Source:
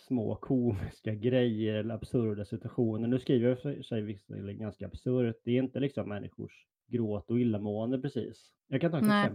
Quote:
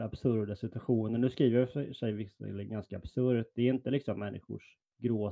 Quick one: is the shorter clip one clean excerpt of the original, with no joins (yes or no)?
yes